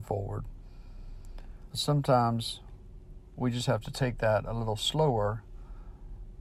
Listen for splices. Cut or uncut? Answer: cut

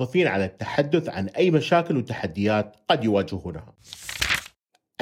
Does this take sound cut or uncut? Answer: uncut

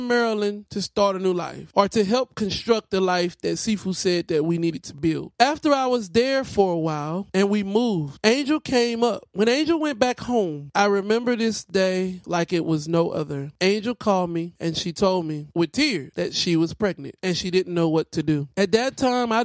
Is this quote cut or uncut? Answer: uncut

